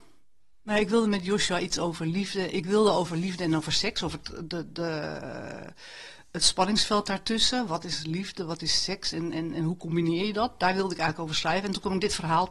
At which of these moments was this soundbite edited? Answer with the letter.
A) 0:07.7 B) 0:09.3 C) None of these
C